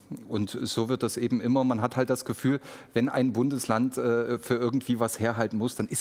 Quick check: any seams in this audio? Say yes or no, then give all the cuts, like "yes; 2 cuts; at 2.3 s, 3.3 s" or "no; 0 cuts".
no; 0 cuts